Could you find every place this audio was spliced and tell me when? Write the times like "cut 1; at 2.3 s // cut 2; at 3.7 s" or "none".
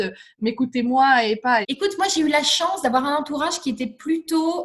cut 1; at 1.6 s